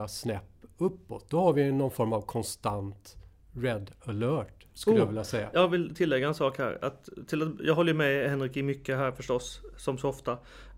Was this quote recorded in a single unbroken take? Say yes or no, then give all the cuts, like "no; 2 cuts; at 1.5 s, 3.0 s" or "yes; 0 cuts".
yes; 0 cuts